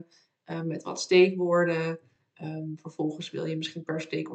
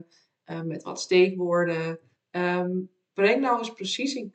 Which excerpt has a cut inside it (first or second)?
second